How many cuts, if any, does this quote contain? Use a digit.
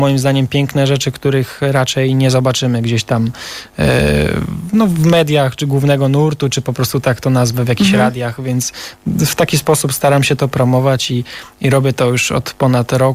0